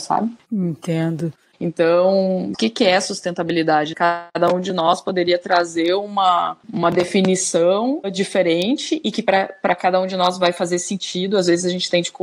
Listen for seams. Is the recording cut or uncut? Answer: cut